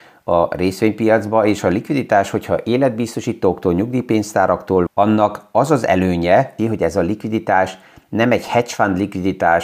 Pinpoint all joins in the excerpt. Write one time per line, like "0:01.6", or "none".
0:04.9
0:06.6